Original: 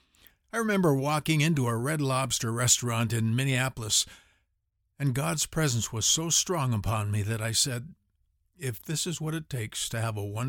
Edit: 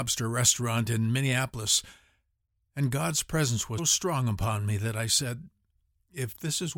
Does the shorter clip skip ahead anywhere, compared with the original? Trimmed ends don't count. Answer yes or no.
yes